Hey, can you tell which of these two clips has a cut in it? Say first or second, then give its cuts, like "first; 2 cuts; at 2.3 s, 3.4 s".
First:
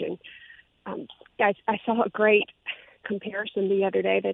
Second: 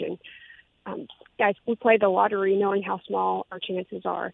second; 1 cut; at 1.6 s